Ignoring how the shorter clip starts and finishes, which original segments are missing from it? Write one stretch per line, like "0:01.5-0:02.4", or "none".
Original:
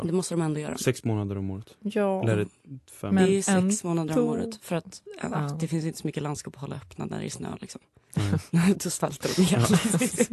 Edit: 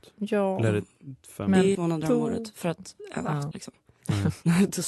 0:03.4-0:03.8
0:05.6-0:07.6